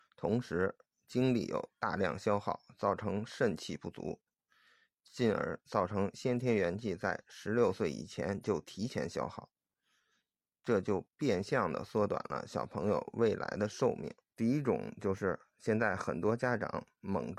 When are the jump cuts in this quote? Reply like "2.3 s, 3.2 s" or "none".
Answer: 14.3 s